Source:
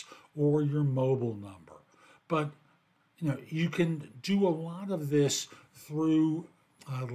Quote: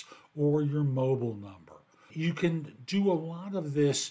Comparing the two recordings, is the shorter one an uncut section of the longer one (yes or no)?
no